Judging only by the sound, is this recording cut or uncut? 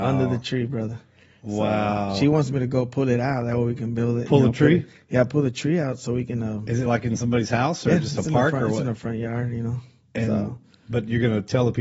uncut